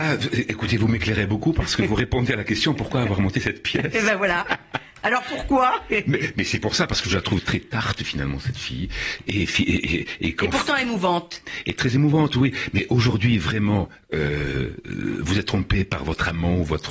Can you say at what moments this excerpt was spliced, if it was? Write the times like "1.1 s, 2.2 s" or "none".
none